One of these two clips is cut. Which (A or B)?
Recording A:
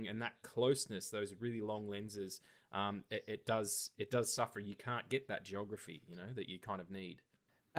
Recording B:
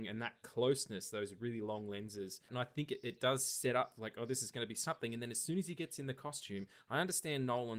B